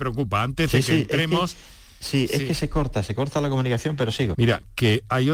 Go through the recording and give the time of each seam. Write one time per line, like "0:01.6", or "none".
0:04.3